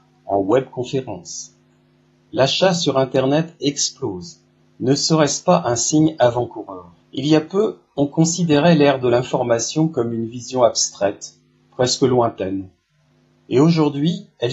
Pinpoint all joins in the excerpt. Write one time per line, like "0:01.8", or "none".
0:04.6
0:07.0